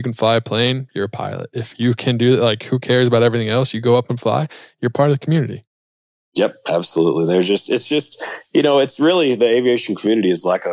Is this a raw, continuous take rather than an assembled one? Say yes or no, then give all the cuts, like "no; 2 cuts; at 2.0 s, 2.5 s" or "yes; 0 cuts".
yes; 0 cuts